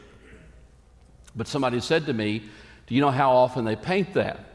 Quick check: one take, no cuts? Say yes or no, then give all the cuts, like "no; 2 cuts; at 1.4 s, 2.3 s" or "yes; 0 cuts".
yes; 0 cuts